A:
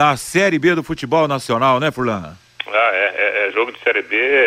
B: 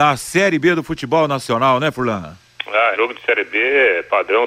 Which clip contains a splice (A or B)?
B